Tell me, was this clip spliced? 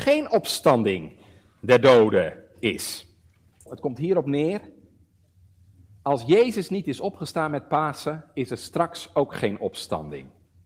yes; 1 cut; at 3.7 s

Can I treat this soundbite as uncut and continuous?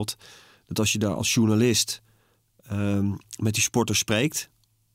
yes; 0 cuts

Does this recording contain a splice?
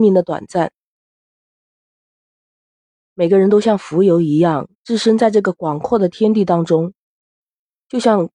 yes; 2 cuts; at 2.2 s, 4.7 s

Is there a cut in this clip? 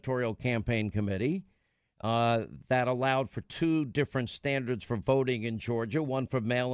no; 0 cuts

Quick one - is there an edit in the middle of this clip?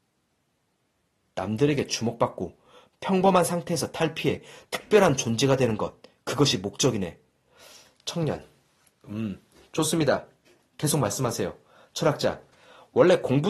no; 0 cuts

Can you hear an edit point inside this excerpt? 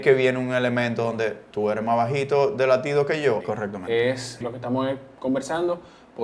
yes; 2 cuts; at 3.4 s, 4.4 s

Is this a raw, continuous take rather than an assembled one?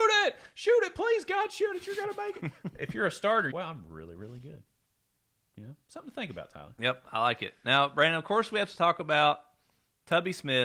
no; 1 cut; at 3.5 s

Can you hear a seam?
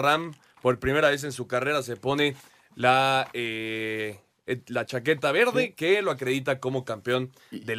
no; 0 cuts

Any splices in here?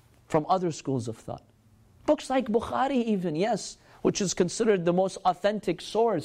no; 0 cuts

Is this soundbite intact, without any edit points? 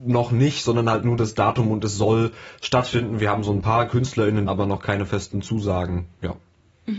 no; 1 cut; at 4.5 s

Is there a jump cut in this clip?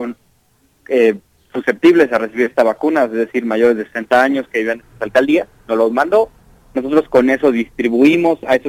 no; 0 cuts

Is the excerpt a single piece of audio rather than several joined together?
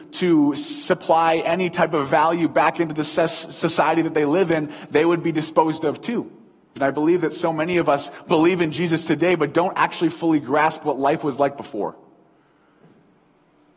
no; 1 cut; at 6.8 s

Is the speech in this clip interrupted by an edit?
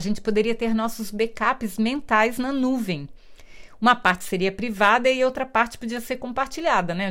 no; 0 cuts

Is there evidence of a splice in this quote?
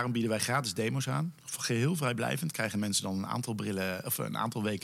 no; 0 cuts

